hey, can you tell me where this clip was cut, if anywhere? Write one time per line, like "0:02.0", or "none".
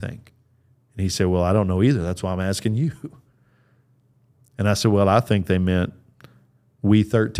none